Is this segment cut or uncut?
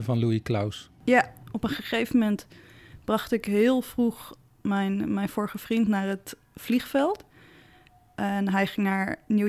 uncut